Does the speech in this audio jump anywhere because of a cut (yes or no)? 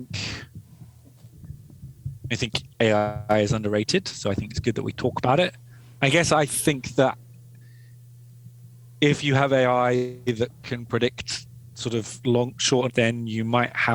yes